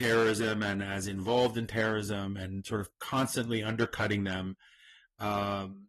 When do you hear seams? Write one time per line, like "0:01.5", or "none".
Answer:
none